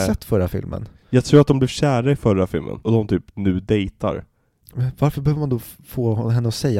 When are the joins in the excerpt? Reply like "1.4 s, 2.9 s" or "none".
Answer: 2.8 s, 4.6 s